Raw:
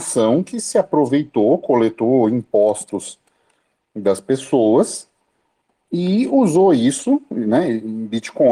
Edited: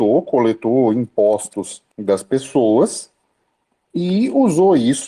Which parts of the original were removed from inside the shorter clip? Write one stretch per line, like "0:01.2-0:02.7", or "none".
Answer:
0:03.3-0:03.9